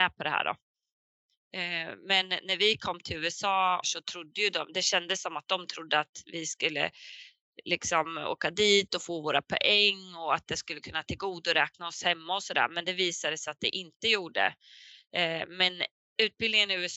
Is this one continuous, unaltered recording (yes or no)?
no